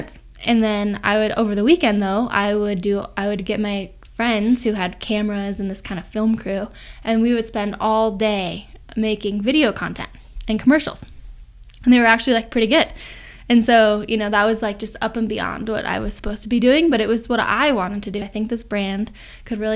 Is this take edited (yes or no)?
yes